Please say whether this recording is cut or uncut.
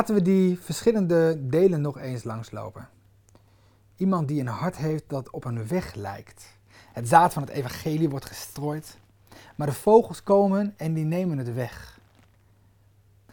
uncut